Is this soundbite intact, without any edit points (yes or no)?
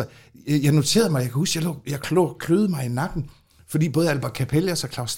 yes